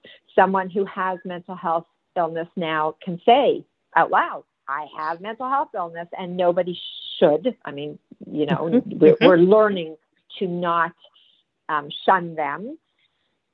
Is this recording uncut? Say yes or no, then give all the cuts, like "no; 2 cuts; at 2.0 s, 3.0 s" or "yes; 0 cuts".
yes; 0 cuts